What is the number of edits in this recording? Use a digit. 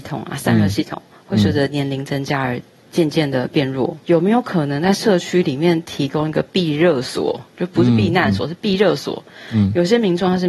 1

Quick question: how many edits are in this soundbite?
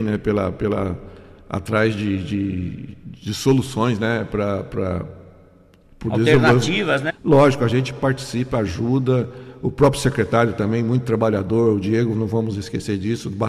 1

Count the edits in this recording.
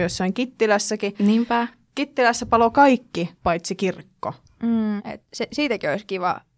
2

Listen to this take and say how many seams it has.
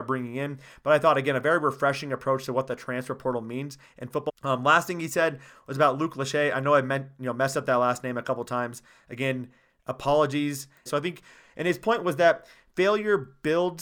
2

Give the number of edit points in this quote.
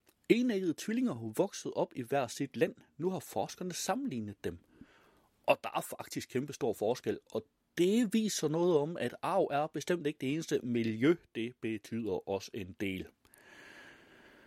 0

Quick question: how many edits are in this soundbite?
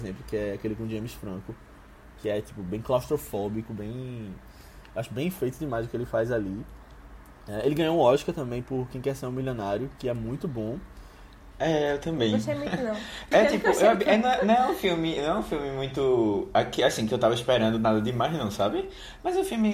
2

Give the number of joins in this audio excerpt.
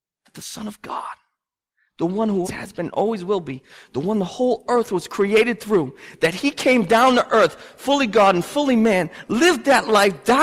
1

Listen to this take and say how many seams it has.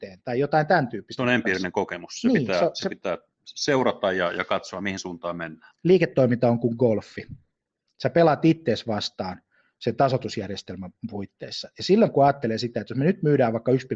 1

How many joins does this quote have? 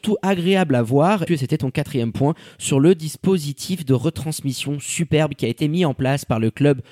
1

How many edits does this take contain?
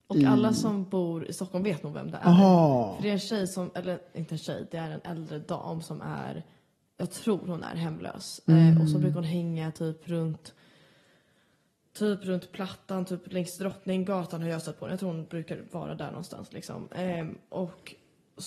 0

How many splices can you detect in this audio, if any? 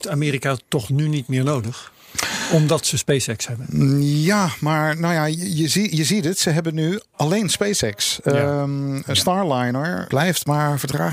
1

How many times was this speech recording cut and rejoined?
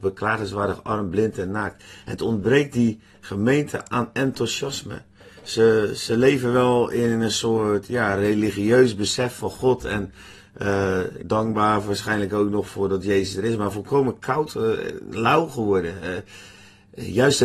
1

